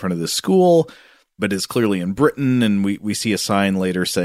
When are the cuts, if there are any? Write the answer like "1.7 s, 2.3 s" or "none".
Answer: none